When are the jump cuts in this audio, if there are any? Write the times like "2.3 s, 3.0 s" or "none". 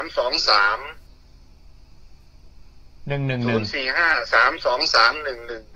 none

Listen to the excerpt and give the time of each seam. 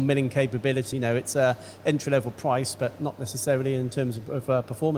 0.9 s

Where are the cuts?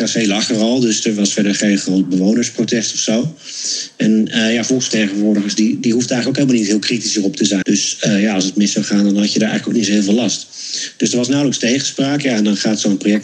7.6 s

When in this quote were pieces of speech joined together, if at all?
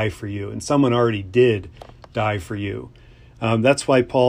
none

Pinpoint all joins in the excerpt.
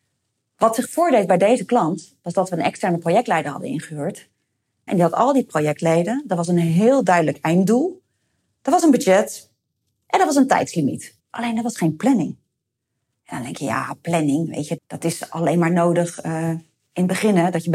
4.9 s, 11.2 s, 14.8 s

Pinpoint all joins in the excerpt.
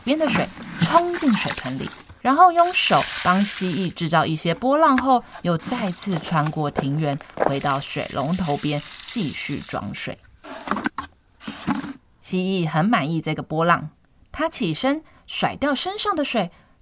none

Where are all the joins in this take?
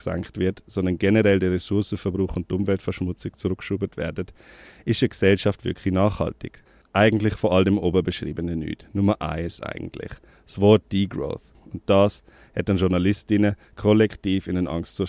6.8 s

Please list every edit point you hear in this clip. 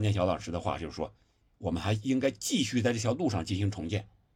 none

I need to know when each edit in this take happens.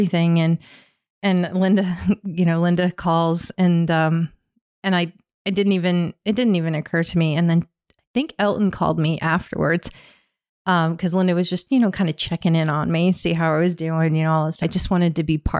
14.6 s

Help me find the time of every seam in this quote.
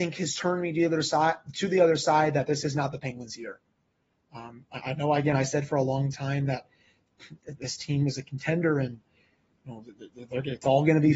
none

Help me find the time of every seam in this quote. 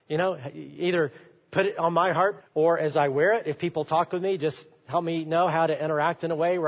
2.4 s

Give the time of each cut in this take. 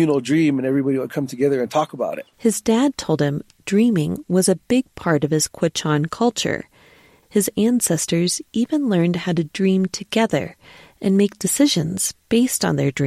2.3 s

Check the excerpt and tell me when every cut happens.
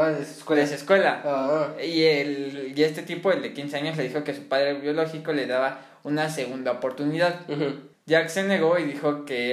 7.9 s

